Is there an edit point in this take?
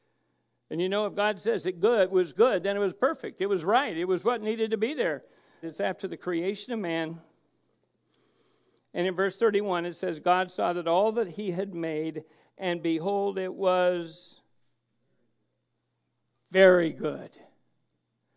yes; 1 cut; at 5.6 s

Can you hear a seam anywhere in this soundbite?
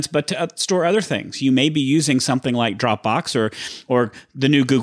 no; 0 cuts

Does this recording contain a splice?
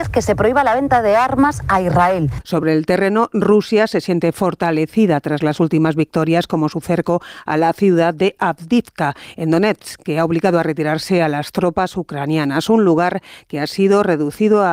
yes; 1 cut; at 2.4 s

